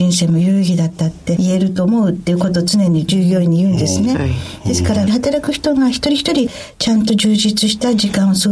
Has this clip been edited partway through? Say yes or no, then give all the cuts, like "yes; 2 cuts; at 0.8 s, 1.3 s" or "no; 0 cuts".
no; 0 cuts